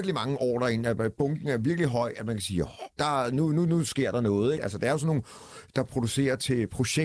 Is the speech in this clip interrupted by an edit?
yes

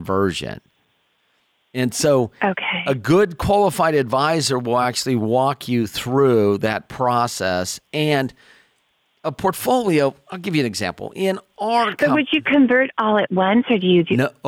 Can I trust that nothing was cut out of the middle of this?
yes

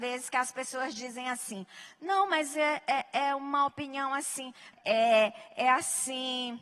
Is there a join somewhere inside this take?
yes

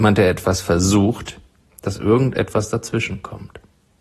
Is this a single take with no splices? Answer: no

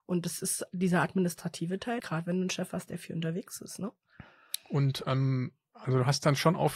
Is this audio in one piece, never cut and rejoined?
no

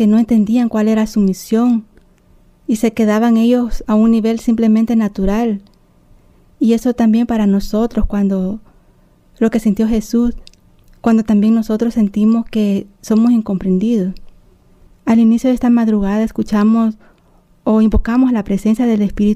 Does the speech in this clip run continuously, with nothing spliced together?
no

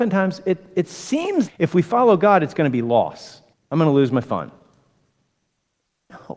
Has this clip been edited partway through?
yes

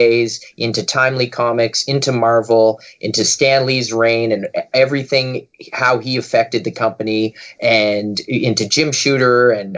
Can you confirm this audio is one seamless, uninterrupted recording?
yes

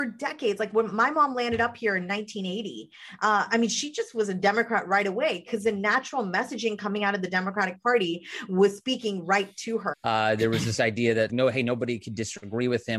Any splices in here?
yes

